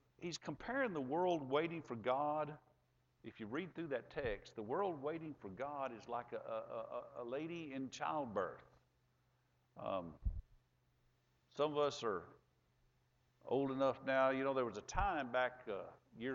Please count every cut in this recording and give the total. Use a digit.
0